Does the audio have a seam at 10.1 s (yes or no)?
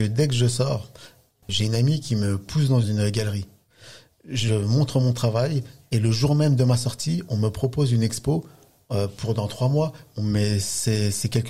no